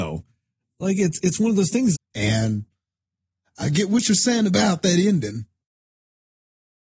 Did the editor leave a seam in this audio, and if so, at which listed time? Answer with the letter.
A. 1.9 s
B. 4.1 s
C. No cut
A